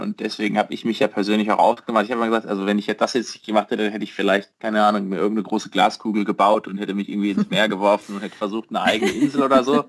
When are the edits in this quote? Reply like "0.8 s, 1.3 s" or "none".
none